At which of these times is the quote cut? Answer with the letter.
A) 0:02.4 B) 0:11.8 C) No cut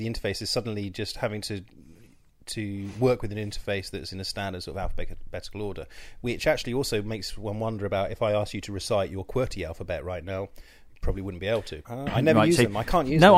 B